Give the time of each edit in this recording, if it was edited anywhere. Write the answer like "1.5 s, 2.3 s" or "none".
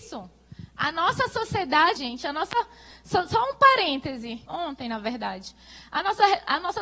2.0 s, 4.4 s